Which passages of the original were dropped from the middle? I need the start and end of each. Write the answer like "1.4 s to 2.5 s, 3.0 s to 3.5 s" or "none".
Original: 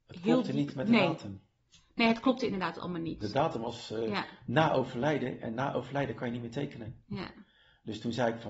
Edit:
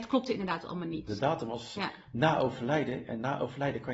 3.9 s to 4.1 s